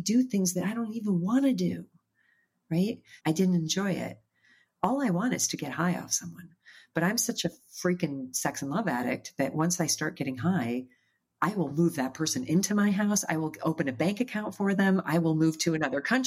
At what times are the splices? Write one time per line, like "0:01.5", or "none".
0:03.2